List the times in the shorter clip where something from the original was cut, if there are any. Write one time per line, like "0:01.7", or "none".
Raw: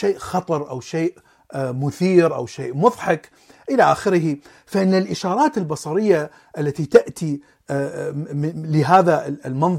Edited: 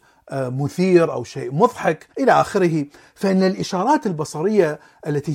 0:02.1